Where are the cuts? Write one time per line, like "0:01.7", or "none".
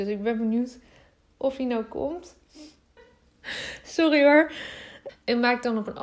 0:03.0
0:05.1